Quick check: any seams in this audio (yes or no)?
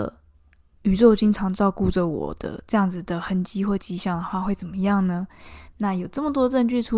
yes